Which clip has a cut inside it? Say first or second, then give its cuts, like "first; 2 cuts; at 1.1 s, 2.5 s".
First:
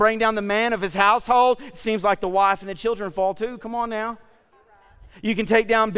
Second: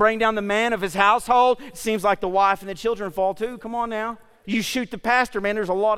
second; 1 cut; at 4.4 s